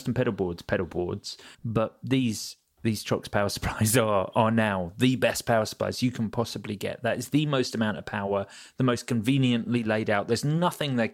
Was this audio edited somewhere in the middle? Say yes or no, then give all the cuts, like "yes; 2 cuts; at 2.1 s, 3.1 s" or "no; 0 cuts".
yes; 1 cut; at 1.5 s